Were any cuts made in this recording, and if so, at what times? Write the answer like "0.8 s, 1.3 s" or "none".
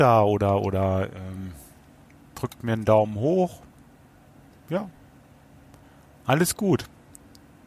none